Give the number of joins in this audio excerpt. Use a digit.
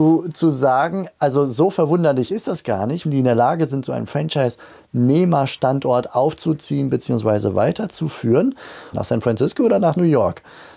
2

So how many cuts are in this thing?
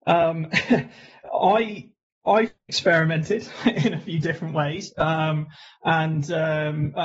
0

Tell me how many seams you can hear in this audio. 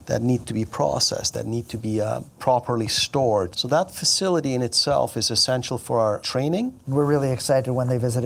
3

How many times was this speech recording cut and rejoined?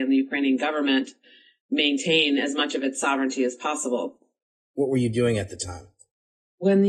1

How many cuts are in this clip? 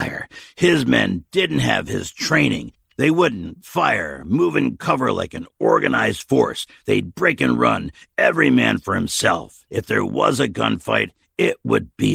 0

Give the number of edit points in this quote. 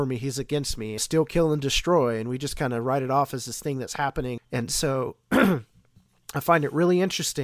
2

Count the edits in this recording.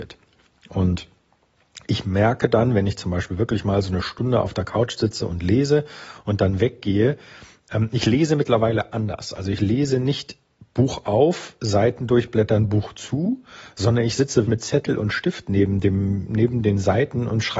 1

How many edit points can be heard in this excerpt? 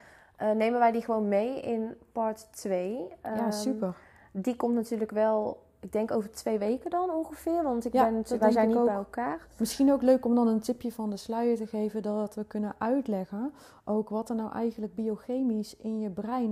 0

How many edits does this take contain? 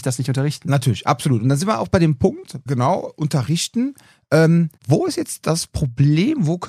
2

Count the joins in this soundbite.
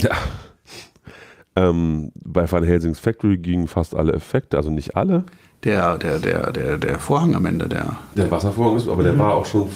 0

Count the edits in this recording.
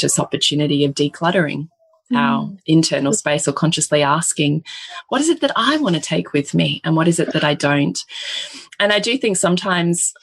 0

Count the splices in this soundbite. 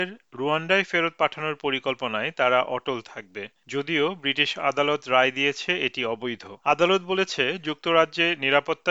1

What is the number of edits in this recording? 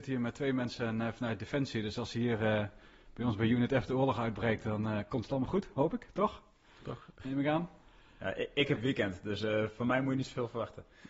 0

